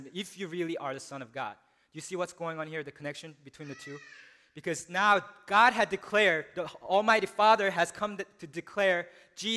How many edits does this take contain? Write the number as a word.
zero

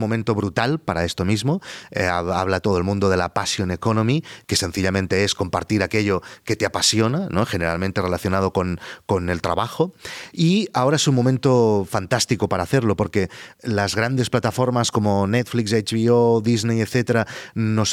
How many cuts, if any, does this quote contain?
zero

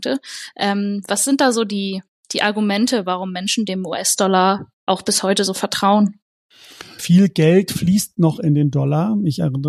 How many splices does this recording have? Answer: one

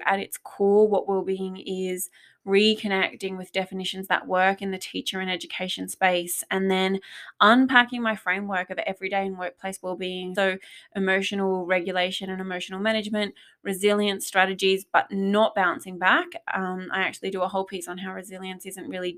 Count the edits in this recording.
one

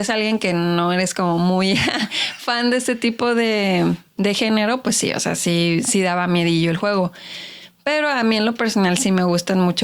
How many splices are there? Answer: zero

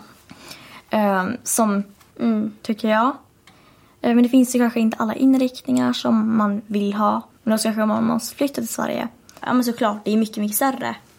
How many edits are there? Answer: three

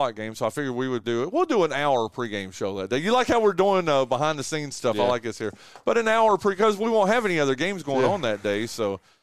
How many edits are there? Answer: one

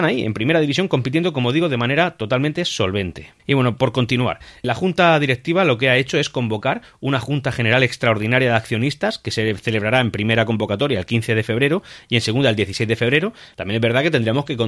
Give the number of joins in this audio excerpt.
three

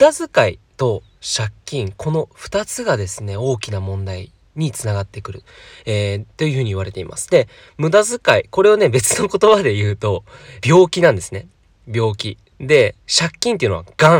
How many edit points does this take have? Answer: two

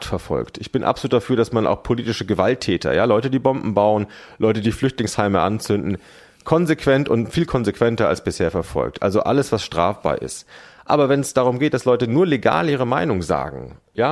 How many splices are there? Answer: zero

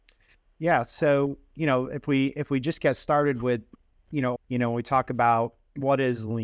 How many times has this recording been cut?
one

